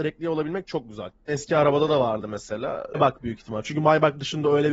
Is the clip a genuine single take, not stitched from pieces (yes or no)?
no